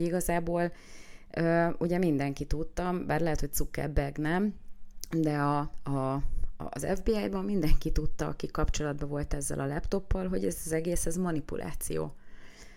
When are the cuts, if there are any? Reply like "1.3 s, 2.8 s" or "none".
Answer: none